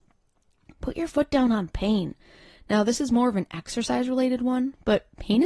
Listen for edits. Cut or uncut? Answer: uncut